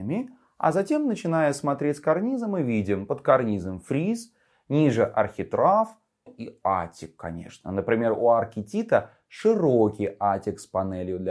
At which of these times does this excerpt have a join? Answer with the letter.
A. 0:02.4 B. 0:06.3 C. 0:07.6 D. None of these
B